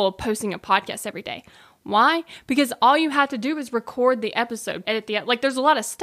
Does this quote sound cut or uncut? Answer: cut